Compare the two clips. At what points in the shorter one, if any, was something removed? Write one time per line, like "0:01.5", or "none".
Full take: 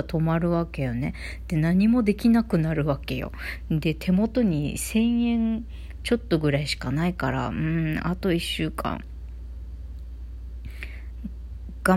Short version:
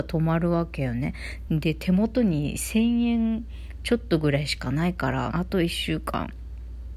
0:01.5
0:05.3